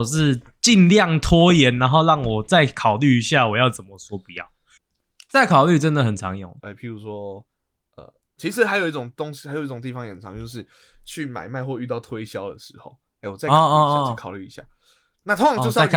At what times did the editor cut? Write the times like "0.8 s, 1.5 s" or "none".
4.8 s, 6.6 s